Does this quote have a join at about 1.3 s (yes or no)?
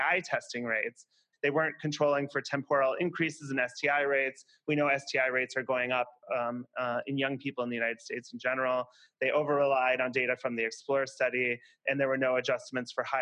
yes